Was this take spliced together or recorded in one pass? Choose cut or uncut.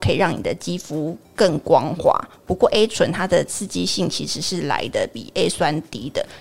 uncut